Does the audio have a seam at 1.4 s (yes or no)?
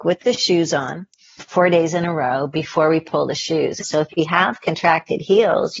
yes